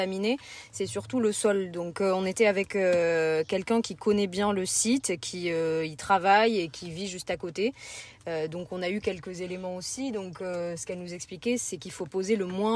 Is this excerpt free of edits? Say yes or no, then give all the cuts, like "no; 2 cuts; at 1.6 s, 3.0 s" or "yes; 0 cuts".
yes; 0 cuts